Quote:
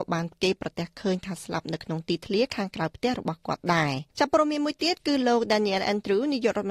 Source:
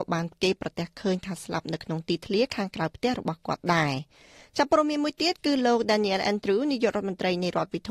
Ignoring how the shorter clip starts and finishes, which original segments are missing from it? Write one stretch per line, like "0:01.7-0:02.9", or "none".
0:04.1-0:04.5